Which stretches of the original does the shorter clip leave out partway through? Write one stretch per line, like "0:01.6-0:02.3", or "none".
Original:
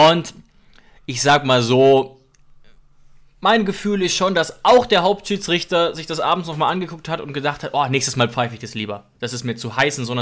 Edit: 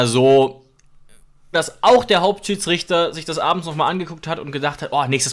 0:03.1-0:04.3